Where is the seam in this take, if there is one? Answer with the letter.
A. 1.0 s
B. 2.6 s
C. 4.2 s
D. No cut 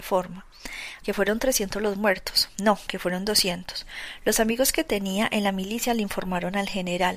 A